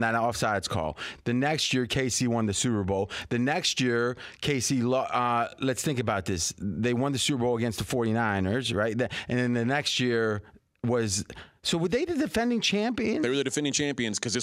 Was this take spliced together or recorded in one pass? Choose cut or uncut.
uncut